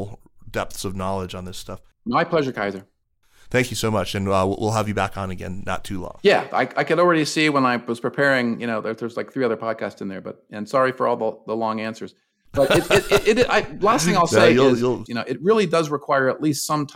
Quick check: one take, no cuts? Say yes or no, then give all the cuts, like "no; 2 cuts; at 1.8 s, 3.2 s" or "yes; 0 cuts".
no; 1 cut; at 15.1 s